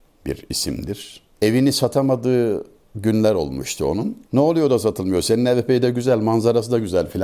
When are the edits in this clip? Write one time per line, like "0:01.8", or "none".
none

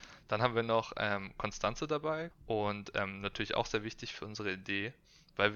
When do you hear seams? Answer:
0:02.3

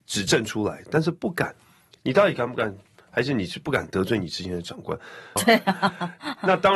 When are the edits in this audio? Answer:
0:05.4

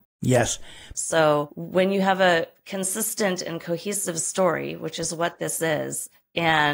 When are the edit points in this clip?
0:00.9

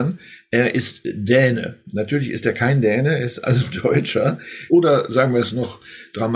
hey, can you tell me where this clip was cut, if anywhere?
0:04.7

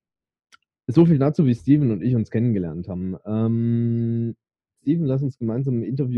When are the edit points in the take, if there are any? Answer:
0:04.8

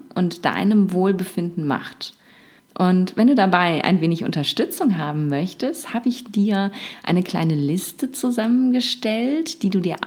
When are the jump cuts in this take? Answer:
0:02.6

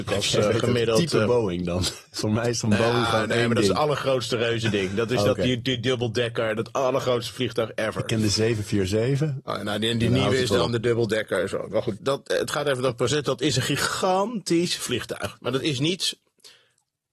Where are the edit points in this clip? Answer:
0:12.0

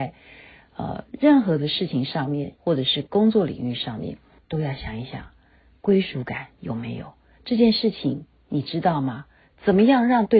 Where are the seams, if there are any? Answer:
0:02.5
0:04.4

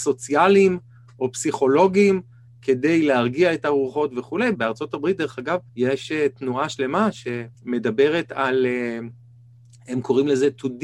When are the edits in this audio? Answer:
0:04.5
0:05.7
0:07.5

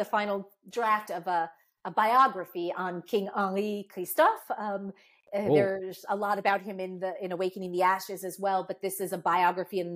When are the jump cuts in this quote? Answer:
0:01.1

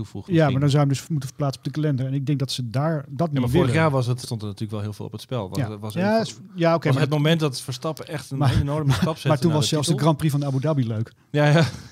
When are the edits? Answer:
0:04.2

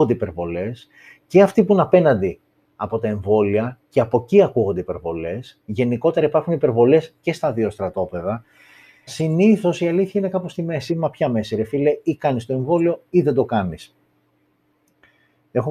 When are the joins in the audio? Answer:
0:09.1
0:10.9

